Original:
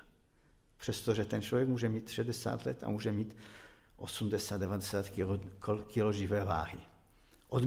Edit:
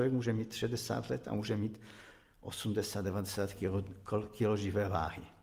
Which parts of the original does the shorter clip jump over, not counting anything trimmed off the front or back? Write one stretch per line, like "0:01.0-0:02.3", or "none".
none